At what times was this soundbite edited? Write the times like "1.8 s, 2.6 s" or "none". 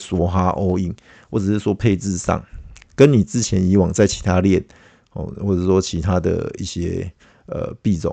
none